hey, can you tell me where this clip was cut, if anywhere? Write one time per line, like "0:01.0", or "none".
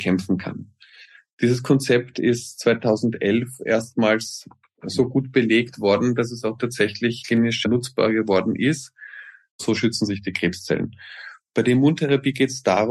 0:09.5
0:11.5